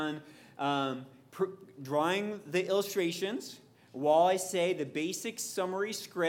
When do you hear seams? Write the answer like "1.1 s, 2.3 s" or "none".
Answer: none